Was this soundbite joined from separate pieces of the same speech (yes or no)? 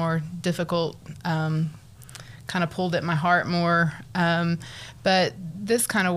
no